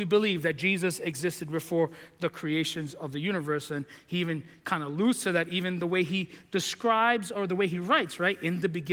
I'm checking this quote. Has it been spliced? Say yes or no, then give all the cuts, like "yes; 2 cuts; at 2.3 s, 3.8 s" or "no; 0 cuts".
no; 0 cuts